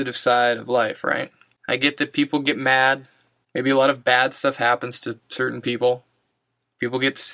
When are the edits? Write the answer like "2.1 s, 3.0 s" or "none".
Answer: none